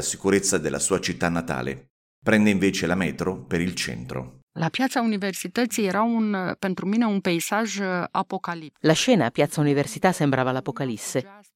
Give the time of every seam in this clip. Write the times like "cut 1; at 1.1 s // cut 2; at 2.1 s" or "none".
none

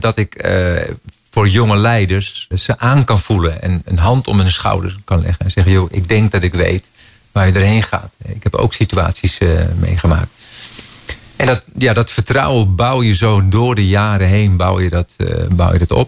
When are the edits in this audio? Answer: cut 1; at 2.5 s

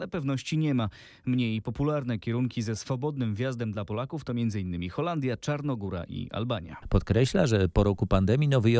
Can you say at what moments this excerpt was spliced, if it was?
cut 1; at 6.8 s

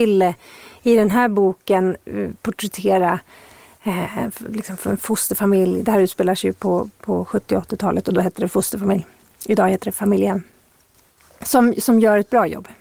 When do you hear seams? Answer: none

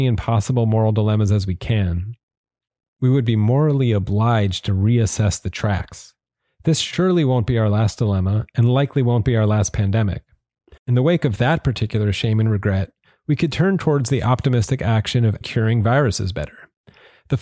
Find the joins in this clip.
cut 1; at 10.8 s // cut 2; at 15.4 s

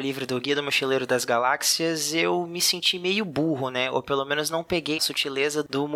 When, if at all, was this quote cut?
cut 1; at 5.0 s

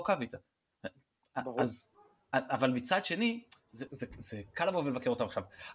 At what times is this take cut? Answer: cut 1; at 3.9 s

